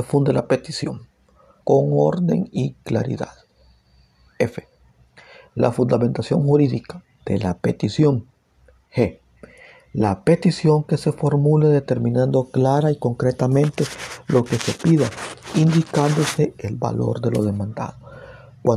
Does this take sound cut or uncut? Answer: cut